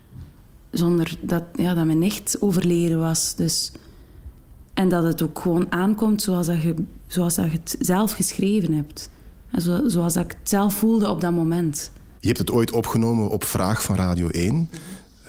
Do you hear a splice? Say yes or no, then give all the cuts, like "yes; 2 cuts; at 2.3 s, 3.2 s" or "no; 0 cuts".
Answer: yes; 1 cut; at 4.7 s